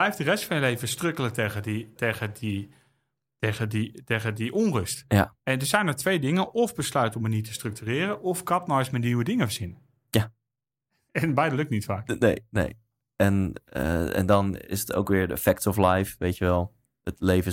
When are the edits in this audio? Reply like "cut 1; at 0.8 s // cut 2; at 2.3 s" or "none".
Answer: cut 1; at 2.0 s